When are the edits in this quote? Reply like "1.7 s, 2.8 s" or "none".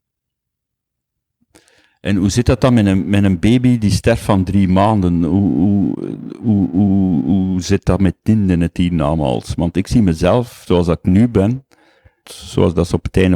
12.2 s